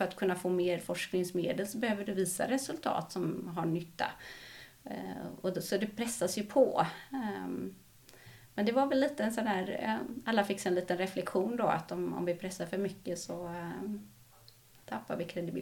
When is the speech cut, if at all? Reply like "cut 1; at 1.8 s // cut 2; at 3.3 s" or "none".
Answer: none